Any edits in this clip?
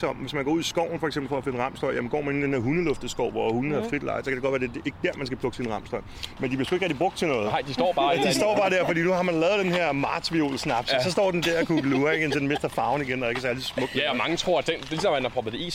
yes; 1 cut; at 6.4 s

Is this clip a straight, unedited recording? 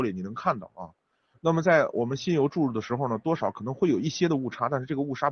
no; 1 cut; at 1.3 s

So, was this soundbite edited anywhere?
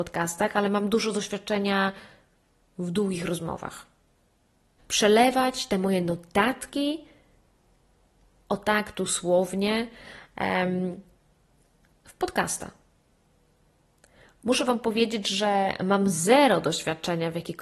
yes; 1 cut; at 4.8 s

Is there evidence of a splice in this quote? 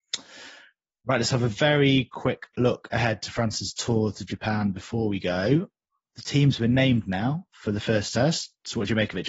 no; 0 cuts

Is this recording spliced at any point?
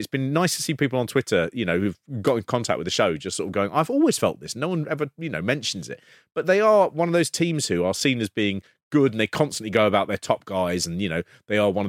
no; 0 cuts

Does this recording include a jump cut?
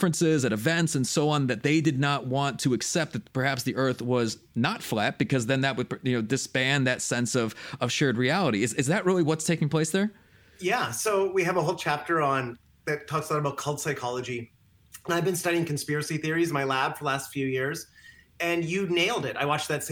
no; 0 cuts

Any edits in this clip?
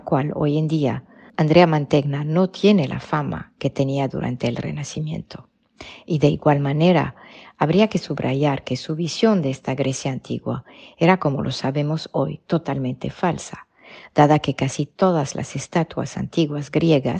no; 0 cuts

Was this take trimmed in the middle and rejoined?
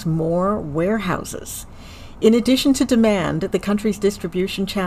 no; 0 cuts

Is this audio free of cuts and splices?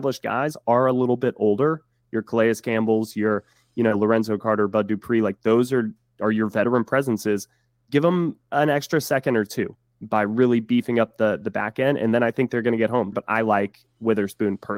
no; 1 cut; at 13.1 s

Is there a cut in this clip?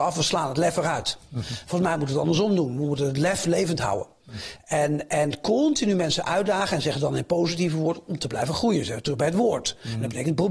no; 0 cuts

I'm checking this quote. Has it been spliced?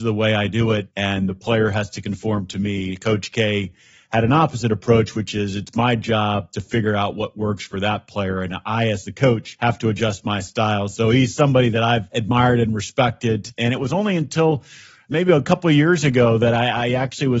no; 0 cuts

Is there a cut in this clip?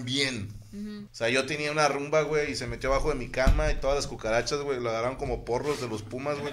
yes; 1 cut; at 1.1 s

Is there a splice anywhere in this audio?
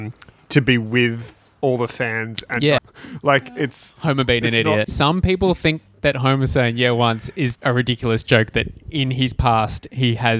yes; 3 cuts; at 2.8 s, 4.8 s, 7.6 s

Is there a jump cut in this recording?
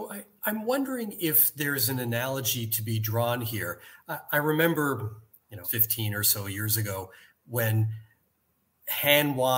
yes; 1 cut; at 5.6 s

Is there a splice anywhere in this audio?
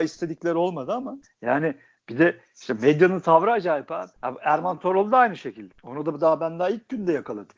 yes; 1 cut; at 4.2 s

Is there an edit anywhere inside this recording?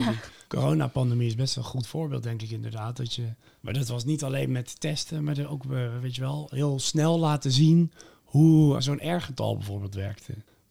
yes; 1 cut; at 8.8 s

